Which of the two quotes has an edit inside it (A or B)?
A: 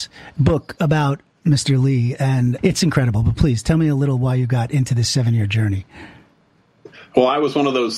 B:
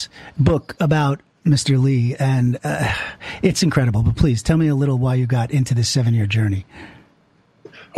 A